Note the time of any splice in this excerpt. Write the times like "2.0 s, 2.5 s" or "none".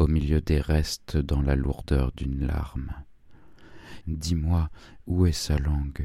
4.0 s